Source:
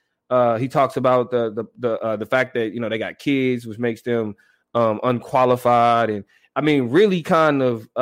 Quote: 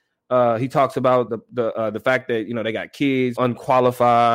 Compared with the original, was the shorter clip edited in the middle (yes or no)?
yes